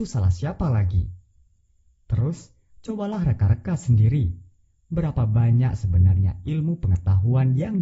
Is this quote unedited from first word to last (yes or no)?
yes